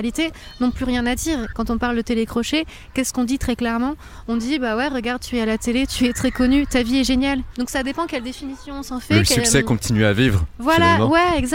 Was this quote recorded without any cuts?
no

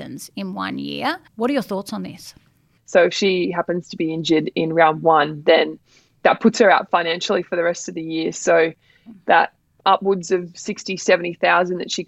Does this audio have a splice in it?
yes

